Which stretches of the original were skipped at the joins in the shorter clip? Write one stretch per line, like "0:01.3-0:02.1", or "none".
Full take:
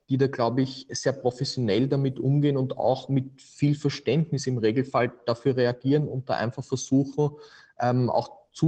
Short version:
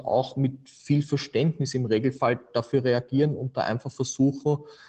none